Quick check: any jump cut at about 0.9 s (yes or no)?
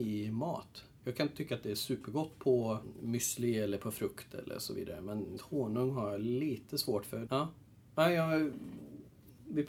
no